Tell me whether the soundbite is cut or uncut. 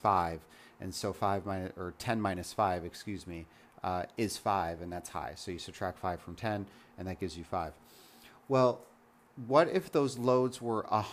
uncut